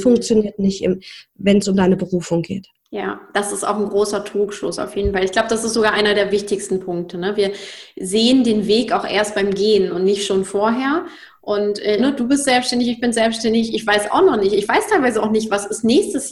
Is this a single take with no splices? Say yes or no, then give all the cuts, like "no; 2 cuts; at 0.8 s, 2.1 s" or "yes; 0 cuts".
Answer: no; 1 cut; at 12.0 s